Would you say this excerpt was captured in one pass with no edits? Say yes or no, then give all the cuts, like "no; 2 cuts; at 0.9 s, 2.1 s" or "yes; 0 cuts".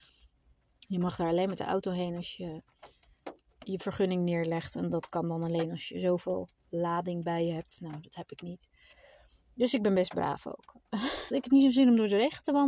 no; 2 cuts; at 3.5 s, 11.3 s